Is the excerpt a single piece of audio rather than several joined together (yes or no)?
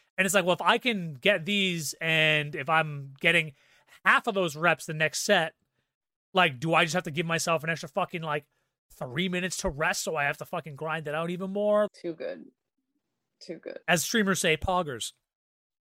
no